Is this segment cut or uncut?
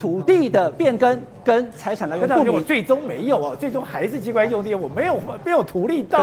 uncut